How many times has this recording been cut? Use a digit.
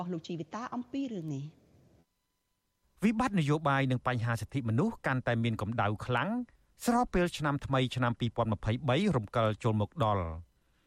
0